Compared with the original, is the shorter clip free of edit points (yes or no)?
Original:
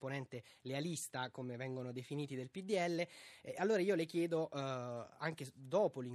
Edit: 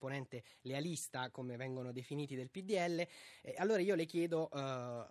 yes